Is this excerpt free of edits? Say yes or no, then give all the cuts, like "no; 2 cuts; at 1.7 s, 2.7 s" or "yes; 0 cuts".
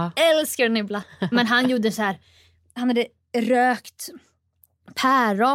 no; 1 cut; at 1.0 s